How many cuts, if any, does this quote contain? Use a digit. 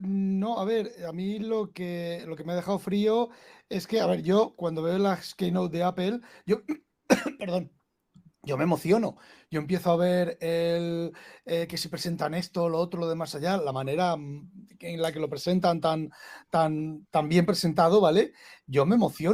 0